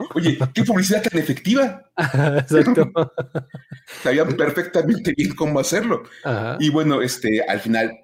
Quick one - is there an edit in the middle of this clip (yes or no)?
no